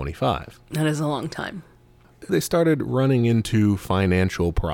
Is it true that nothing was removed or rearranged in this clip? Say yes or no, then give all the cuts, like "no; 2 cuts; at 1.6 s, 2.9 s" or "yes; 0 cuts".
no; 1 cut; at 2.3 s